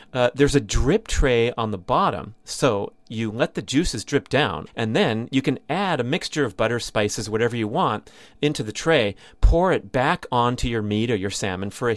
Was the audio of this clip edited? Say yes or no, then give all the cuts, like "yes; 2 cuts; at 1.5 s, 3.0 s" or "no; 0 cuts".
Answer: yes; 1 cut; at 4.7 s